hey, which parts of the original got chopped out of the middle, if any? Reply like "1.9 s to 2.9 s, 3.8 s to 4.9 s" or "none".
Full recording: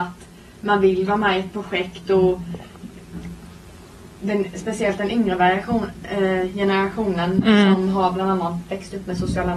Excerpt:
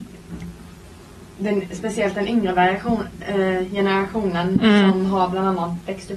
none